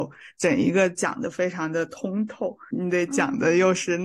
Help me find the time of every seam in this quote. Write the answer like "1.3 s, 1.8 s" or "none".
2.7 s